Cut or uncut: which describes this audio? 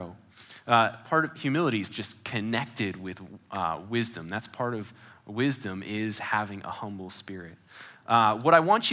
uncut